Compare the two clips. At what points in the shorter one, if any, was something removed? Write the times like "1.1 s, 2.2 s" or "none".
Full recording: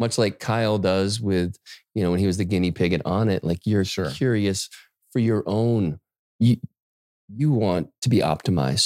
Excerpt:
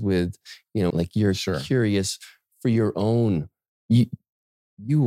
0.9 s